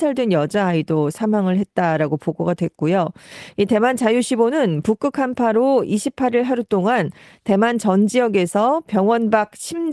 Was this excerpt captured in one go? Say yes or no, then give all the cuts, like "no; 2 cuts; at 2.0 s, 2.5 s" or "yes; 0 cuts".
yes; 0 cuts